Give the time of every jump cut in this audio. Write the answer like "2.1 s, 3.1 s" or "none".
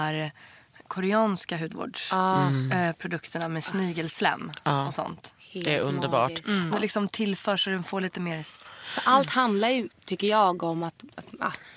6.7 s